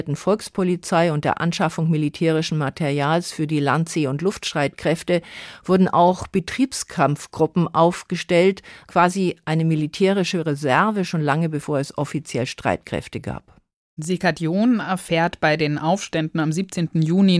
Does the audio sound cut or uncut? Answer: uncut